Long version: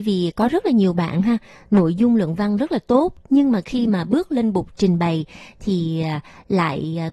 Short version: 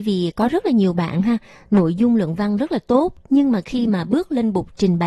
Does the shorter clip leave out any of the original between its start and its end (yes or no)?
no